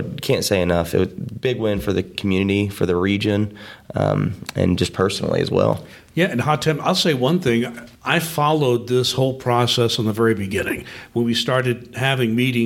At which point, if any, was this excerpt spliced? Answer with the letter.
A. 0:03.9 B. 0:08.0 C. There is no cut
B